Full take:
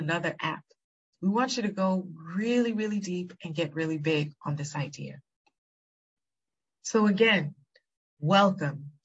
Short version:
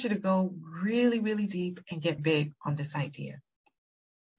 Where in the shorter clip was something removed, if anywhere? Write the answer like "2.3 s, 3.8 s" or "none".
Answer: 2.2 s